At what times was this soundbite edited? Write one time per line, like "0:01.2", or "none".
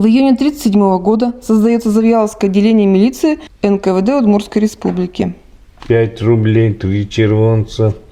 0:05.8